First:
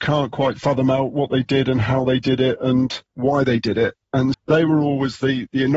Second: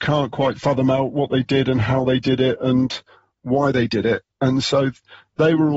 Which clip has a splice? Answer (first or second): first